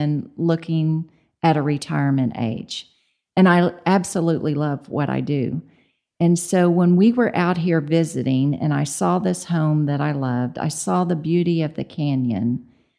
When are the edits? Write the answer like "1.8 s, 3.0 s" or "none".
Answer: none